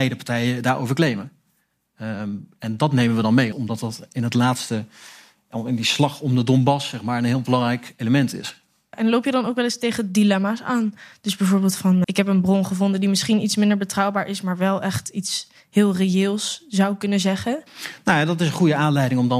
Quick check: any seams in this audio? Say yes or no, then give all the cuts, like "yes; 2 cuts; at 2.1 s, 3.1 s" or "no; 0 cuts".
yes; 2 cuts; at 3.5 s, 12.0 s